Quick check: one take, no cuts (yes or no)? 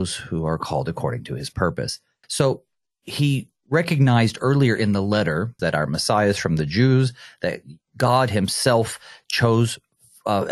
no